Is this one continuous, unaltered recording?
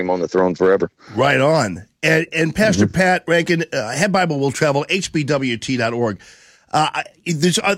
yes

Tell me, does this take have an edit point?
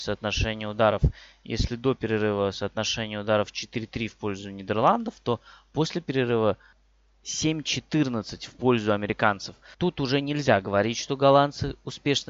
yes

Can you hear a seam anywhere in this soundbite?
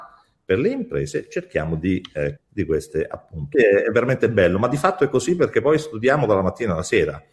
yes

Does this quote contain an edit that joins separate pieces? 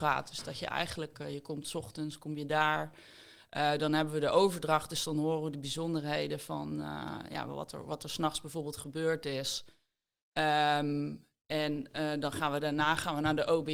no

